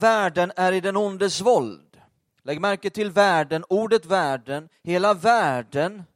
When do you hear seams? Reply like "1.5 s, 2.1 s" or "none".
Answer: none